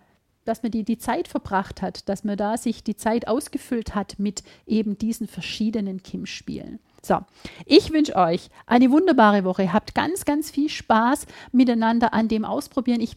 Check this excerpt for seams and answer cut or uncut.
uncut